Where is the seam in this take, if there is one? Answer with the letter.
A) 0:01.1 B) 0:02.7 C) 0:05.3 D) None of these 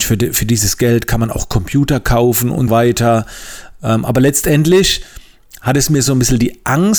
B